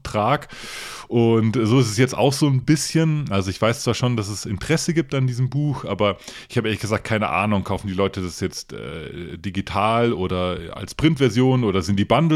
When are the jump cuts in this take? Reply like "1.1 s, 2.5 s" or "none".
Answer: none

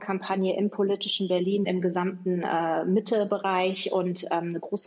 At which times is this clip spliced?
1.6 s

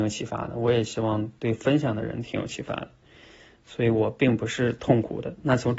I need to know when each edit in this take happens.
none

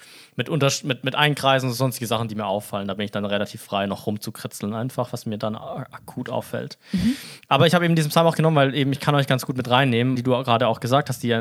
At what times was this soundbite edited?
9.0 s, 10.2 s

